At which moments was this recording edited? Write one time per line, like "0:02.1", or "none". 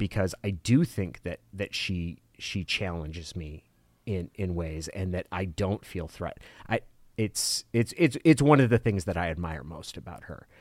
none